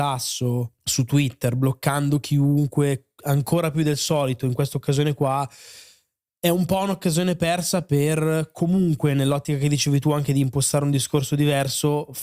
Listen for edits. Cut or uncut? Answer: uncut